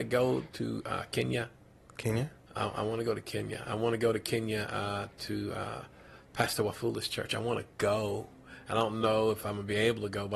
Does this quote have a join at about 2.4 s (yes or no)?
no